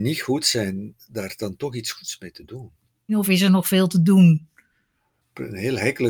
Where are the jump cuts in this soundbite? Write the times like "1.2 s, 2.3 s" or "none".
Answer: 3.1 s